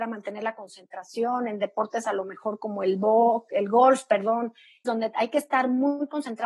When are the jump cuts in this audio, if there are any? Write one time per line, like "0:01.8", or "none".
0:03.5
0:04.8